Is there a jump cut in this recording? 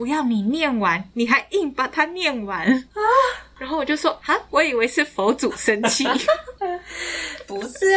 no; 0 cuts

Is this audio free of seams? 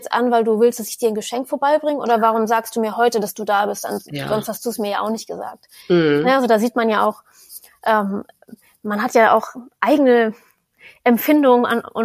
yes; 0 cuts

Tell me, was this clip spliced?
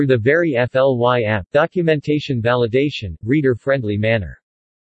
yes; 2 cuts; at 1.5 s, 3.2 s

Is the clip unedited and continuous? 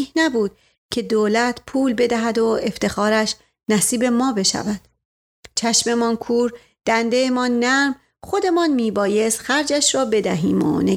yes; 0 cuts

